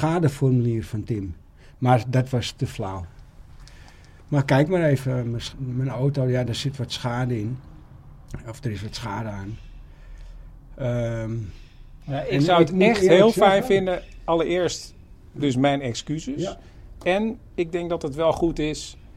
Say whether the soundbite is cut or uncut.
cut